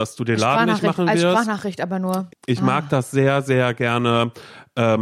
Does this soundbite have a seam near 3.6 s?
no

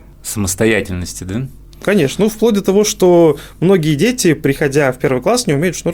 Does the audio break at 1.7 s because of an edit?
no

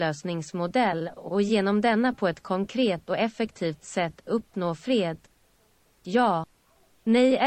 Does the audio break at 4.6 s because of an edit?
no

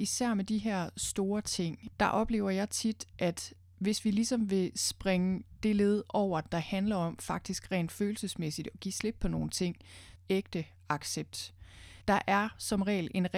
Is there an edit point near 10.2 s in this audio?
yes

